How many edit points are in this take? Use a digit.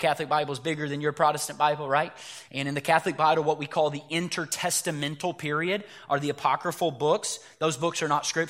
0